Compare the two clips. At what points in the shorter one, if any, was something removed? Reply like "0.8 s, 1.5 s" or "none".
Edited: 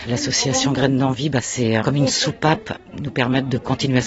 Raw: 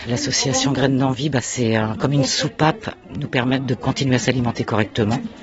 1.8 s